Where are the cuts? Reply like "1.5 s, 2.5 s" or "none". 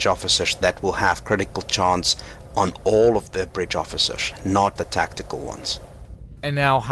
4.8 s

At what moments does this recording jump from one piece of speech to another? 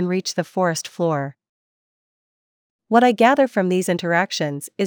2.7 s

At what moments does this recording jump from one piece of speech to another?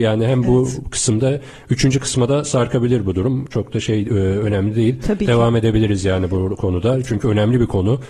none

